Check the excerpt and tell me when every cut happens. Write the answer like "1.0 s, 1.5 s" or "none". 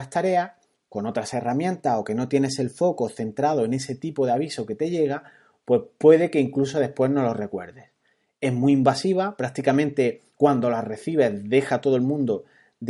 none